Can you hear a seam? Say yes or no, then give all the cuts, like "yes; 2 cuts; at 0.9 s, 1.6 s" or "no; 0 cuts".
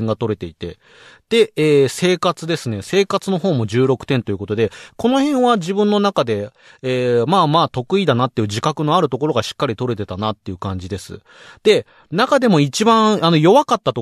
no; 0 cuts